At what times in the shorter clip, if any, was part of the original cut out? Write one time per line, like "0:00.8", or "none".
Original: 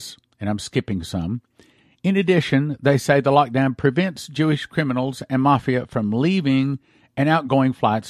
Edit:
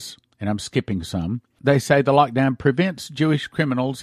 0:01.6